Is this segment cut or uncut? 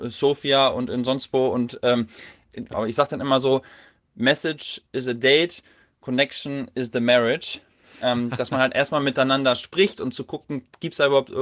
cut